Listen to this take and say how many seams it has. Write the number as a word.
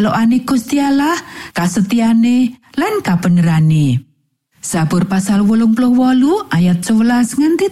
one